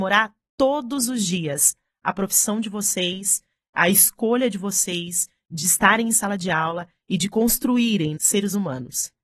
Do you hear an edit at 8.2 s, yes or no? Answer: yes